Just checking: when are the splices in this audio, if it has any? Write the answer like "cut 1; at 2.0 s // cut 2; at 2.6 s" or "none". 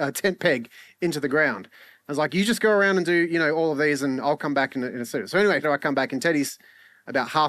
cut 1; at 5.6 s